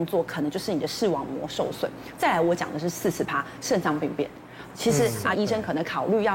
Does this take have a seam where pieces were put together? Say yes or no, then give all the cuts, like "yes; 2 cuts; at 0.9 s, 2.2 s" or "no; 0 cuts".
yes; 1 cut; at 5.3 s